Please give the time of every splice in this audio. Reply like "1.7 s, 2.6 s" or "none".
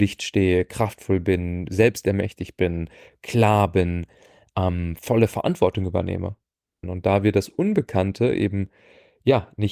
6.8 s